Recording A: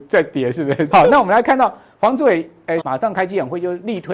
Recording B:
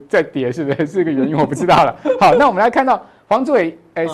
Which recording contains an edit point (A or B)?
A